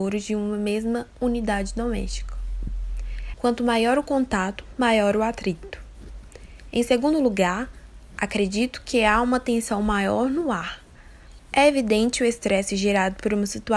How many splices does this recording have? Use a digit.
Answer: 2